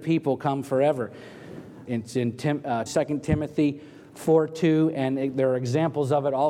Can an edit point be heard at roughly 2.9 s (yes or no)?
yes